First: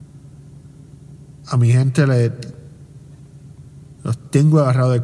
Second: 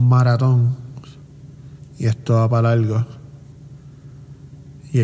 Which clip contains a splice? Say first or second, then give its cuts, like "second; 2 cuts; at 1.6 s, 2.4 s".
first; 1 cut; at 4.0 s